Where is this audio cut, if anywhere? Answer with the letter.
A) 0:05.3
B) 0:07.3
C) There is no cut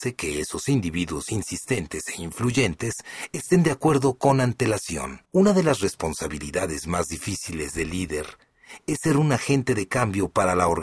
A